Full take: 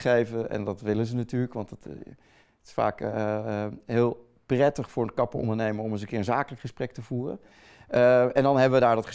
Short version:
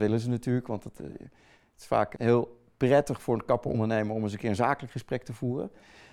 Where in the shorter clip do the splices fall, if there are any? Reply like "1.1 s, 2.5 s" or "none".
2.2 s